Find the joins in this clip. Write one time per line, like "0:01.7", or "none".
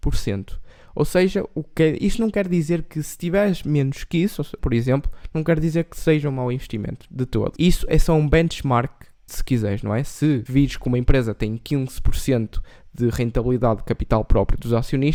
0:04.6
0:09.3